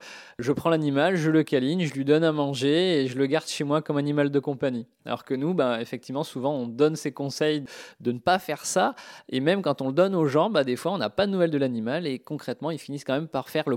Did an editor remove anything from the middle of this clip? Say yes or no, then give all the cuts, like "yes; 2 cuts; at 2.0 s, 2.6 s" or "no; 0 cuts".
no; 0 cuts